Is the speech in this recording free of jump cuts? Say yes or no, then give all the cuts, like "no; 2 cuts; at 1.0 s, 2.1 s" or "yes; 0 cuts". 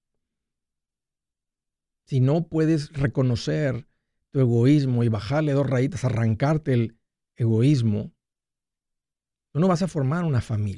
yes; 0 cuts